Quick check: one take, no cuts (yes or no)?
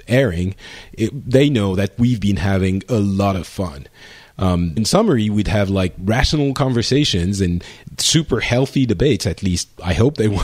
no